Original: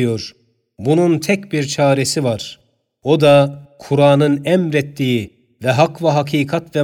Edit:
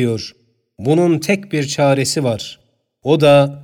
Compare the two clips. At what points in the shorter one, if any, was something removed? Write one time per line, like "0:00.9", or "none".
none